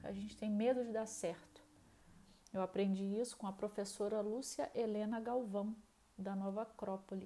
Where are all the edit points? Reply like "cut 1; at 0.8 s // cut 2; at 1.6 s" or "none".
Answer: none